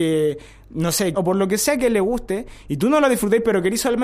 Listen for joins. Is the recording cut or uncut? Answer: cut